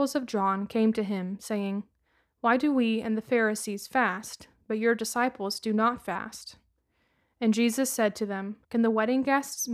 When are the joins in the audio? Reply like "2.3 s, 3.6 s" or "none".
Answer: 8.6 s